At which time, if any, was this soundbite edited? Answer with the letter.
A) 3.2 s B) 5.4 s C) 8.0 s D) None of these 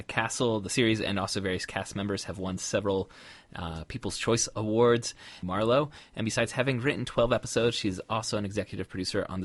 B